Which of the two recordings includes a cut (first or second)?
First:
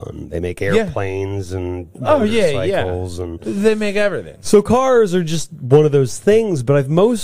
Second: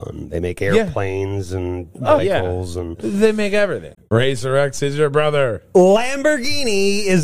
second